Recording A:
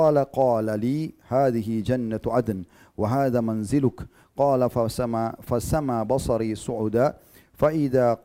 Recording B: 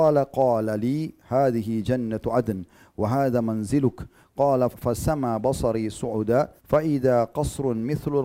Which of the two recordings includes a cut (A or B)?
B